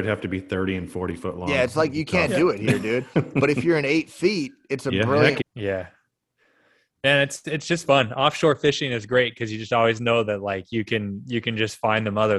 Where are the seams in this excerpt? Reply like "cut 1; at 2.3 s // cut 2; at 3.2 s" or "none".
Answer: cut 1; at 5.4 s